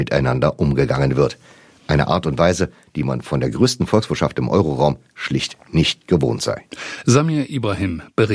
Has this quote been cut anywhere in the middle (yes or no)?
no